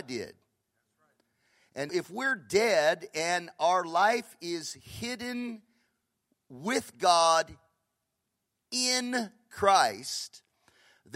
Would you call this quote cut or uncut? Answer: cut